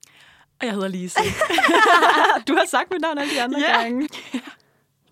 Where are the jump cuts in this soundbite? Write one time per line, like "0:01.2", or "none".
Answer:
0:04.1